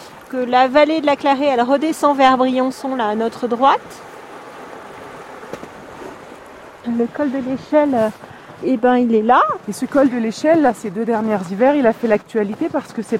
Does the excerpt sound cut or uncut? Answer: cut